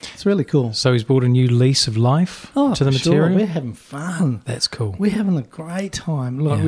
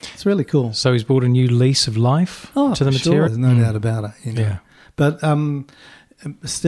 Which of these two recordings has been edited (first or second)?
second